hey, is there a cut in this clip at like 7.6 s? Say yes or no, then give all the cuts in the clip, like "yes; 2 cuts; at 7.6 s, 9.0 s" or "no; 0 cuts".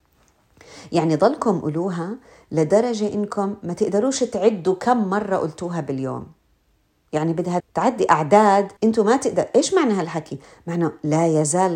yes; 2 cuts; at 7.6 s, 8.8 s